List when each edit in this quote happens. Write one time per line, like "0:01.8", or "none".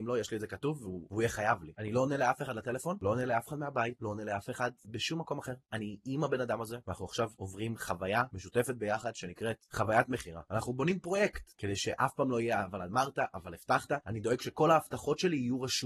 0:01.7
0:11.5